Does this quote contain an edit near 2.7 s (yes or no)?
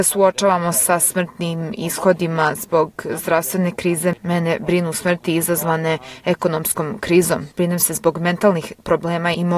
no